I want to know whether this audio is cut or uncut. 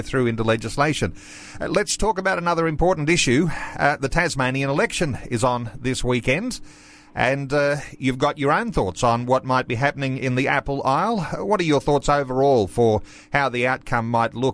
uncut